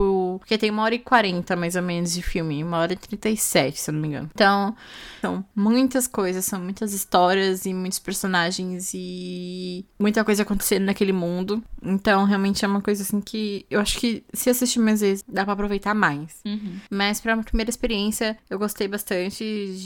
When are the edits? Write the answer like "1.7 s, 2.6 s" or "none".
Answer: 15.2 s